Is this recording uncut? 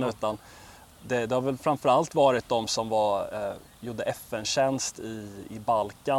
yes; 0 cuts

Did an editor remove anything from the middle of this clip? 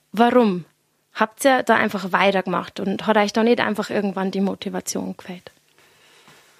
no; 0 cuts

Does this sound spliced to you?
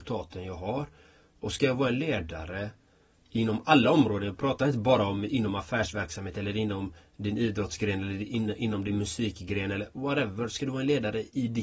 no; 0 cuts

